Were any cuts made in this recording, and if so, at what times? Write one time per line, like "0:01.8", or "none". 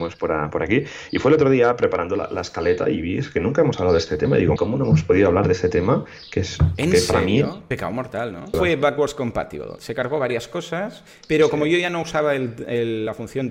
0:04.6
0:08.5